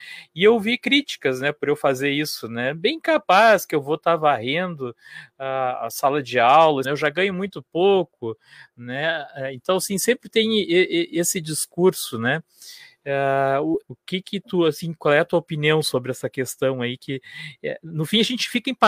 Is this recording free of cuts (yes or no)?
no